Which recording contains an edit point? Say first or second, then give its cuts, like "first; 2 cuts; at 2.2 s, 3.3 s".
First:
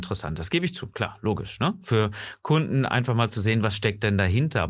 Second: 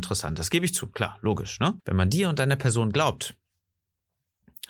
second; 1 cut; at 1.8 s